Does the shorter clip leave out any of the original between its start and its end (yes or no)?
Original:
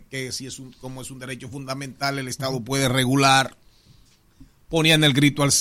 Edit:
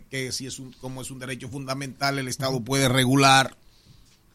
no